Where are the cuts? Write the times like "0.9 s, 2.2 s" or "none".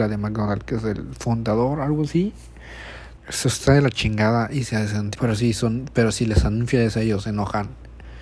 3.2 s, 5.2 s